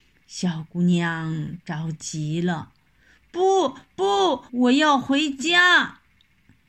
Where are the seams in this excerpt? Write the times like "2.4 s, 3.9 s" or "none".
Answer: 4.5 s